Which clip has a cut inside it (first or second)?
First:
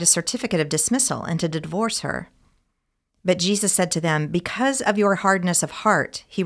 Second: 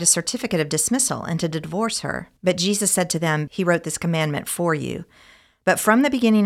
second